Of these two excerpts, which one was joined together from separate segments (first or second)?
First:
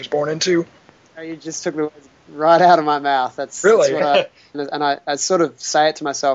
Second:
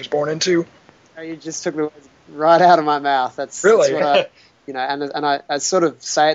first